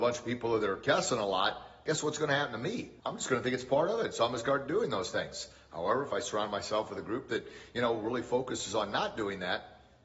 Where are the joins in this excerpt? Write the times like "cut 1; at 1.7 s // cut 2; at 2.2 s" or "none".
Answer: cut 1; at 3.0 s